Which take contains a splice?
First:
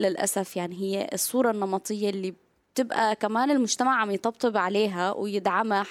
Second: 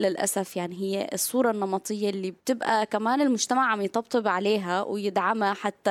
second; 1 cut; at 2.4 s

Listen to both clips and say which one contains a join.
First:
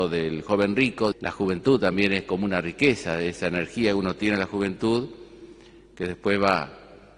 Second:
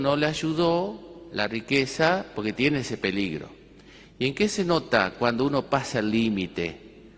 first; 1 cut; at 1.1 s

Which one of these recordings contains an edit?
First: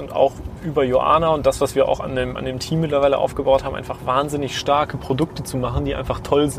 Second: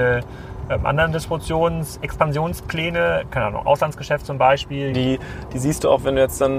second; 1 cut; at 4.9 s

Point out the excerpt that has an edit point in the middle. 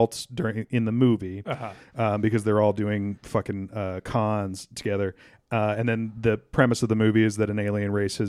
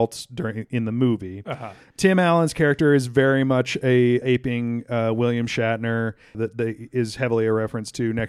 second; 3 cuts; at 1.9 s, 4.2 s, 6.3 s

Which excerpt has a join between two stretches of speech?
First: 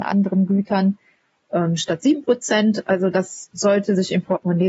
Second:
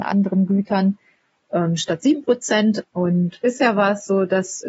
second; 1 cut; at 2.8 s

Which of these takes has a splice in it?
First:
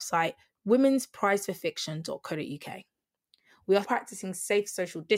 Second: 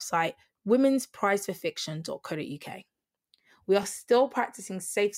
first; 1 cut; at 3.8 s

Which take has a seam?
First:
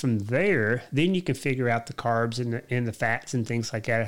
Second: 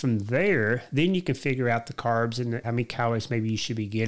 second; 1 cut; at 2.6 s

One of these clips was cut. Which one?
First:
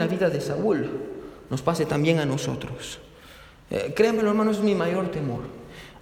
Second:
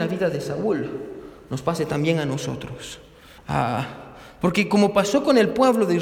second; 1 cut; at 3.4 s

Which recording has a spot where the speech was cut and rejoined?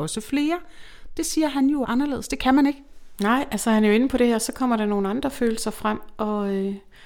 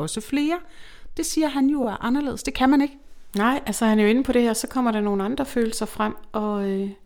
first; 1 cut; at 1.8 s

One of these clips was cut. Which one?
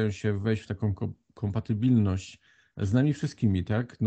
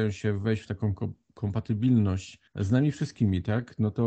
second; 1 cut; at 2.5 s

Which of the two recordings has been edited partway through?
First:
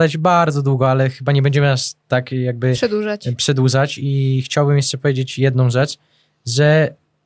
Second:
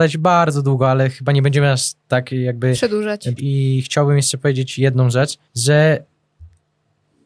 second; 2 cuts; at 3.4 s, 5.5 s

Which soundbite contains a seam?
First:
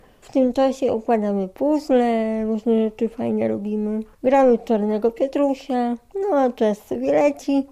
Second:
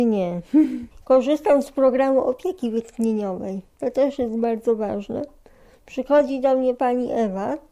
first; 1 cut; at 4.1 s

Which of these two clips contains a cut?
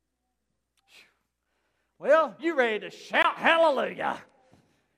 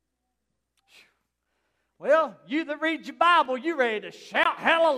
first; 1 cut; at 2.4 s

